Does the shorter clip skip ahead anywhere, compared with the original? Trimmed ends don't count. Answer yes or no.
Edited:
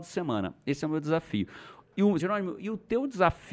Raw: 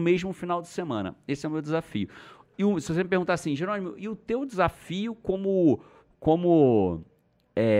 yes